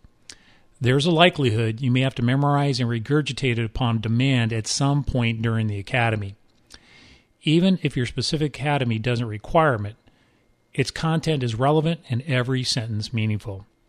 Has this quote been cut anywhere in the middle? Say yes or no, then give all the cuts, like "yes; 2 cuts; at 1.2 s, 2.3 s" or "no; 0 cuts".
no; 0 cuts